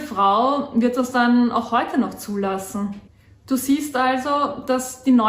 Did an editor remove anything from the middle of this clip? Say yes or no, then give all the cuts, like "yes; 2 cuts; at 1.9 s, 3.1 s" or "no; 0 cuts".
no; 0 cuts